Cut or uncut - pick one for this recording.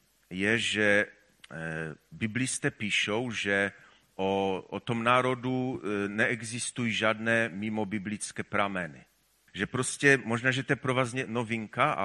cut